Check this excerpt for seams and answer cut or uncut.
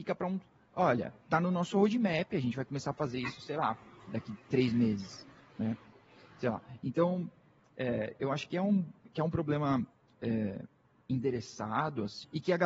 uncut